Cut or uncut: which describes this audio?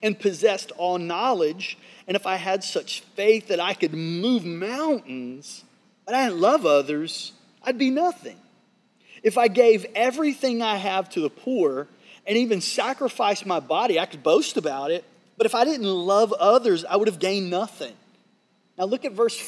uncut